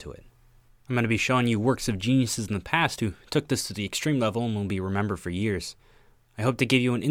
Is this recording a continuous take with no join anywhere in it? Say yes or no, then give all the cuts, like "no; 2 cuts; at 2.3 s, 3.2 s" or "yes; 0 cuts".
yes; 0 cuts